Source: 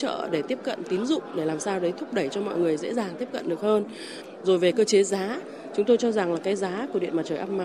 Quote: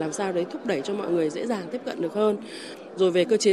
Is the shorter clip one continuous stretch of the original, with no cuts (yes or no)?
yes